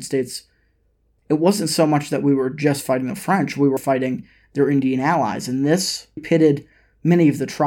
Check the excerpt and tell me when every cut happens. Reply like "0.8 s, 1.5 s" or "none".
1.2 s, 3.8 s, 6.2 s

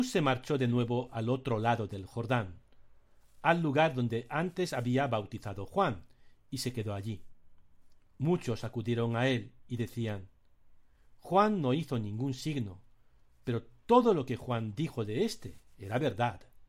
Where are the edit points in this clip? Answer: none

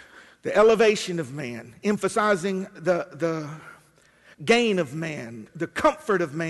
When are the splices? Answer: 5.5 s

